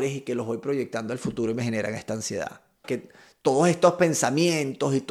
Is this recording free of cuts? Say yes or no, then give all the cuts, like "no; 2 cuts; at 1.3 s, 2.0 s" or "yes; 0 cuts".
no; 1 cut; at 2.8 s